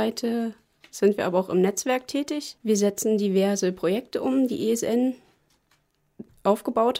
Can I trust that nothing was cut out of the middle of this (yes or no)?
no